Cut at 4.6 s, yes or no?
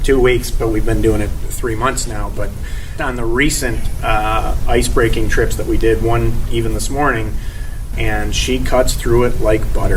no